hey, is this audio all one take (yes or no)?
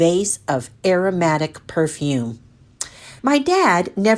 no